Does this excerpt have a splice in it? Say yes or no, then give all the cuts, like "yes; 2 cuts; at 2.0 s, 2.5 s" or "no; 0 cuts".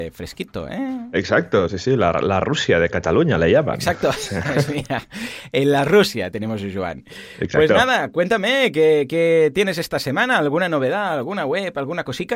no; 0 cuts